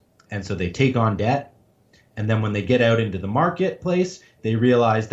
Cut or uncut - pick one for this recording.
uncut